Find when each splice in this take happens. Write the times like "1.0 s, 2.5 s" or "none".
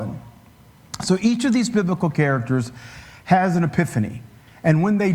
none